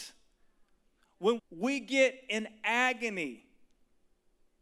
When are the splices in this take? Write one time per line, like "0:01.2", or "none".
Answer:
0:01.4